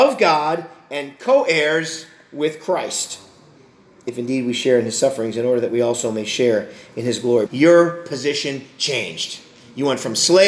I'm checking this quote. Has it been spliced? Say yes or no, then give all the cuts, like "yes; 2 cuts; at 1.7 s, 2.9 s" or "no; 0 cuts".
yes; 1 cut; at 7.5 s